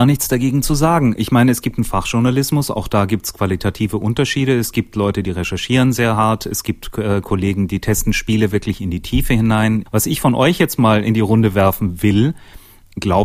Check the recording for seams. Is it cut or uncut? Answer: cut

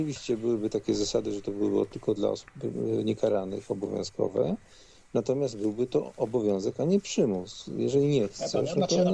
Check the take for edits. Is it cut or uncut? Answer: uncut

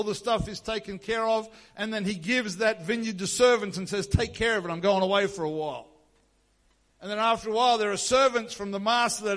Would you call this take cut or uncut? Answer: uncut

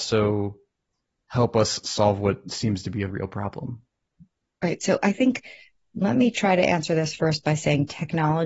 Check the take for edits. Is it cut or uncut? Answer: cut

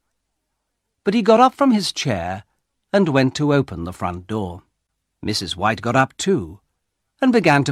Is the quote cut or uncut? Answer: cut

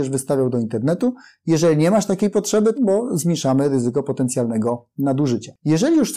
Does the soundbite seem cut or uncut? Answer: cut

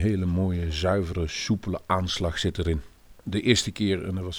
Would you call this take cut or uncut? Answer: cut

